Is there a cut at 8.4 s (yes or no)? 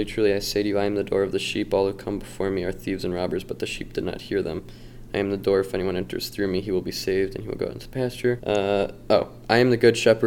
yes